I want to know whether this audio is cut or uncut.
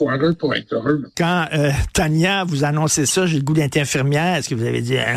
cut